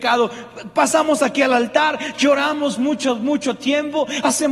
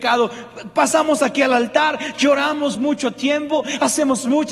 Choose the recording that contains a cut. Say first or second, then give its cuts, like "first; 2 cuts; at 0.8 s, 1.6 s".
second; 1 cut; at 2.8 s